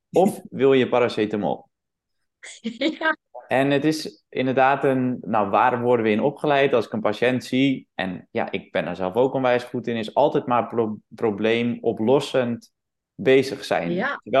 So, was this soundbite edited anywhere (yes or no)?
no